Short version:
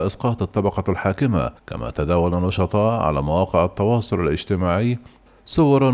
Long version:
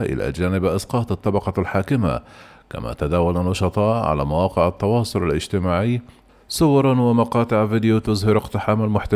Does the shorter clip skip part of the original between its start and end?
yes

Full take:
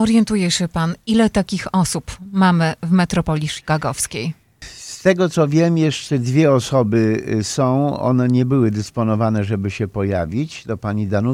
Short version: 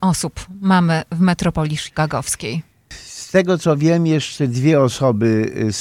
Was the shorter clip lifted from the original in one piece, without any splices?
yes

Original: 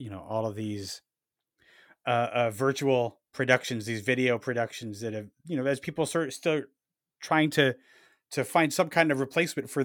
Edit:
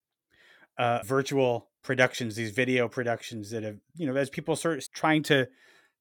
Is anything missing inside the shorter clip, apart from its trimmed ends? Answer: yes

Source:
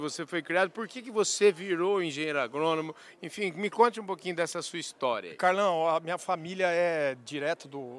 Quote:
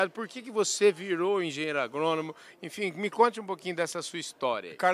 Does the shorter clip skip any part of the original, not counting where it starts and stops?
no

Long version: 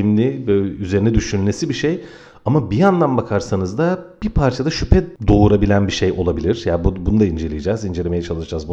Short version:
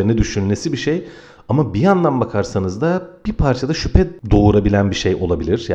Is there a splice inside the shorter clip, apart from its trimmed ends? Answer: no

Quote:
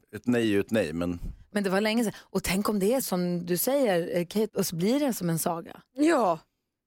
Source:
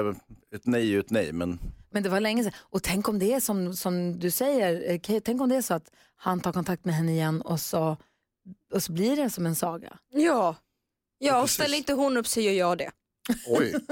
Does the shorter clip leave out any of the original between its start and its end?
yes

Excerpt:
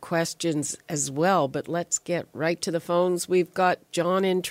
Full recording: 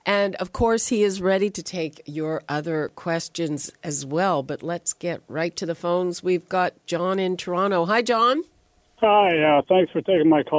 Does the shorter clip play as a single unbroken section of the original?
yes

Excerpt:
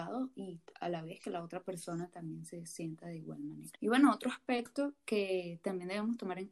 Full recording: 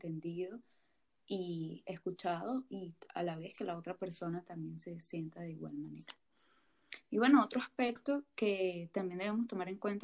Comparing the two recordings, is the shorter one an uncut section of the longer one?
no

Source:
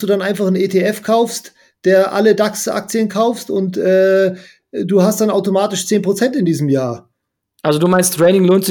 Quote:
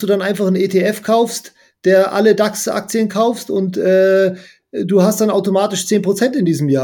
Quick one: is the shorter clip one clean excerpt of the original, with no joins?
yes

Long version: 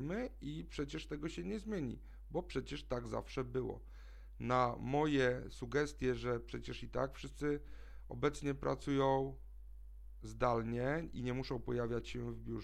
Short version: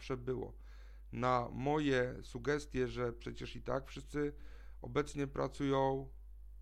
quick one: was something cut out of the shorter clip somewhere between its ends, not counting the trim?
no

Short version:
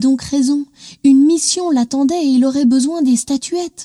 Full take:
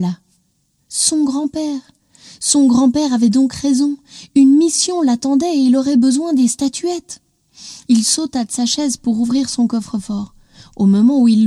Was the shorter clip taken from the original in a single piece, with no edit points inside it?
yes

